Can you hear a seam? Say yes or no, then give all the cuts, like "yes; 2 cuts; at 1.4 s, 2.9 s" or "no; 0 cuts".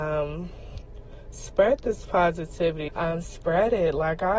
yes; 1 cut; at 2.9 s